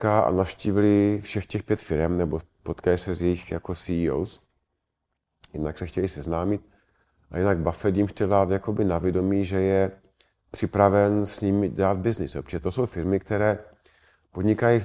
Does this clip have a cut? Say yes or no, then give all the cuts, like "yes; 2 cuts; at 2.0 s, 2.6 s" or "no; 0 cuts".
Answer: no; 0 cuts